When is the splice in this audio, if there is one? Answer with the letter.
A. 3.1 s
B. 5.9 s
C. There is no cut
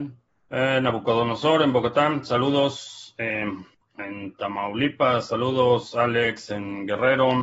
C